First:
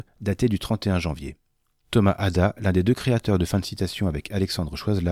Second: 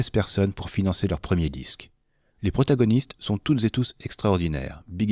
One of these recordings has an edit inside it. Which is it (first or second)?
second